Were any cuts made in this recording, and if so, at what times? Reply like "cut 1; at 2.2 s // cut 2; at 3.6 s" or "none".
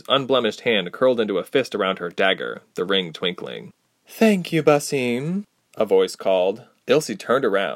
cut 1; at 4.0 s // cut 2; at 6.8 s